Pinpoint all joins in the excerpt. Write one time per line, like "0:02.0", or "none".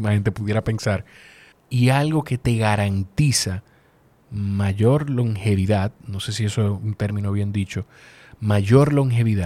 0:01.5